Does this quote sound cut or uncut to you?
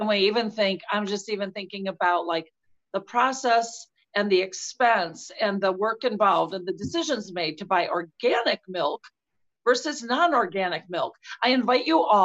uncut